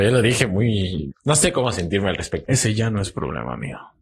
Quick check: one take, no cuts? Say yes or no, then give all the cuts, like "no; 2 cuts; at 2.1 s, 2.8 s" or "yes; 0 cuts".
no; 2 cuts; at 1.1 s, 2.4 s